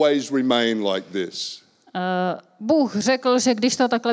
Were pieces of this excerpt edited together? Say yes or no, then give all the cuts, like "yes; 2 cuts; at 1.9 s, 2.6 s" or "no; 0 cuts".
no; 0 cuts